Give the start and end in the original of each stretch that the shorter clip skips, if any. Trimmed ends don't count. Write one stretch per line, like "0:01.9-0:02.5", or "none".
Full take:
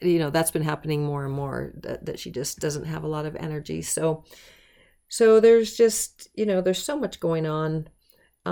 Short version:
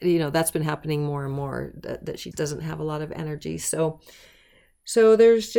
0:02.3-0:02.6

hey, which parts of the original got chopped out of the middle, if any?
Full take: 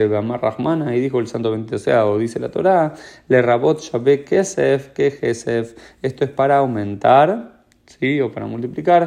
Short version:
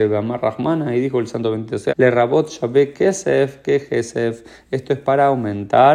0:01.9-0:03.2

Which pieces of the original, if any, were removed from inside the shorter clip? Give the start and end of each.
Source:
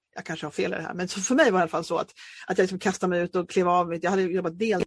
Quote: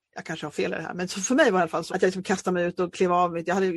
0:01.9-0:02.5

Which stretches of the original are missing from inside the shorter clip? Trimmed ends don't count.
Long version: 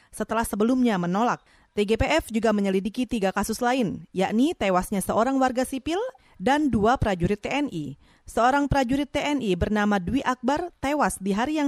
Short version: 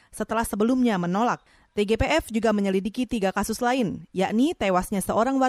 none

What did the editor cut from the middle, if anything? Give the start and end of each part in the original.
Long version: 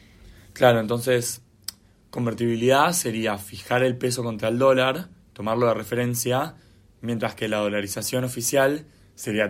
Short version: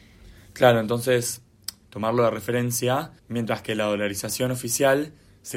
0:01.8-0:05.3
0:06.6-0:06.9

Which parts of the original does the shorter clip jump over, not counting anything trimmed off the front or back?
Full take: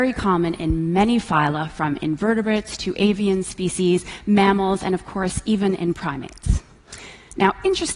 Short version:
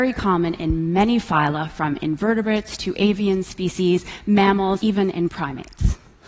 0:04.8-0:05.4

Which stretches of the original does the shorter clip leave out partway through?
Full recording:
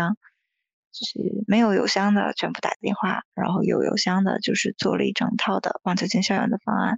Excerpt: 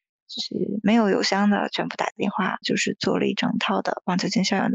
0:03.3-0:04.4

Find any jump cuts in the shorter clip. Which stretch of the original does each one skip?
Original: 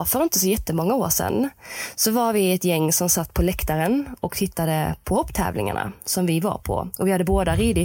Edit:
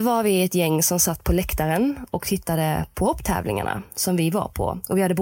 none

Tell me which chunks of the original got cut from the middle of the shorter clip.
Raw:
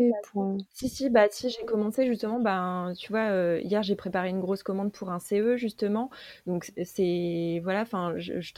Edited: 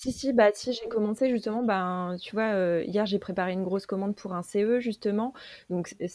none

